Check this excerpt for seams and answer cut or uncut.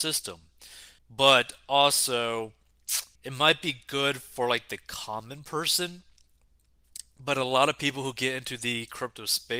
cut